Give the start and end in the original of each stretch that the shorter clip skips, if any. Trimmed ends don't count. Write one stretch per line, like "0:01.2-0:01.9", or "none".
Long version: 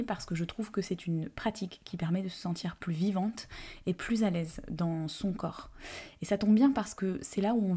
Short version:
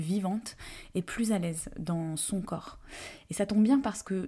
none